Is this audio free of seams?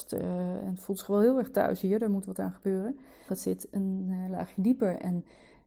no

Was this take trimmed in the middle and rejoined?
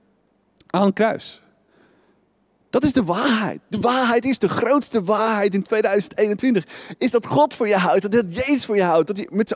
no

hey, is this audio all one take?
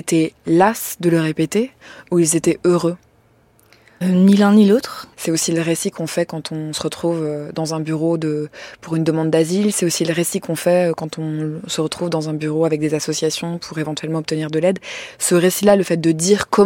no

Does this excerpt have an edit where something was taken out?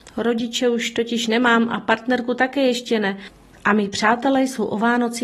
no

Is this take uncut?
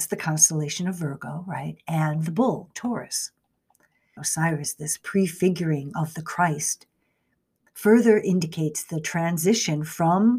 no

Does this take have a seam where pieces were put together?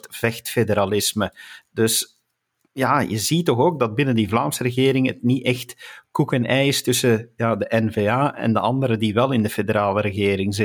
no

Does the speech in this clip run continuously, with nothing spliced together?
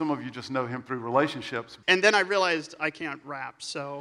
no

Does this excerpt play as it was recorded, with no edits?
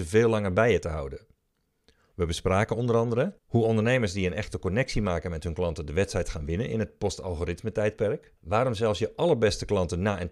no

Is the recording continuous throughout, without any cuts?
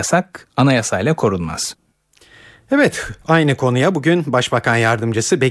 yes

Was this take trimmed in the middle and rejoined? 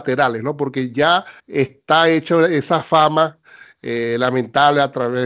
yes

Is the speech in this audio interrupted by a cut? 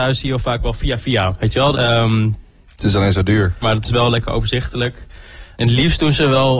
yes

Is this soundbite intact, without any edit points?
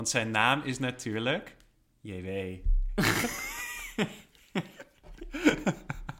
yes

